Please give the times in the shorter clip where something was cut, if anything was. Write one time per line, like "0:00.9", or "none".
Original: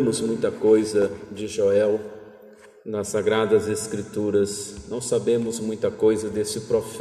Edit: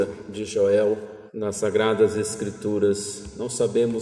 0:01.3